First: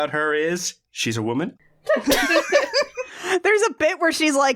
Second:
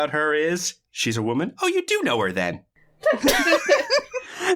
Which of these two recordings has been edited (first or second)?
first